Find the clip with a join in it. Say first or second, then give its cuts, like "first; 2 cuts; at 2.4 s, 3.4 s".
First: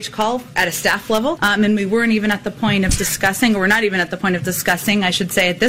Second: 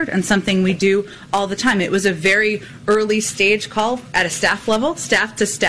first; 1 cut; at 1.4 s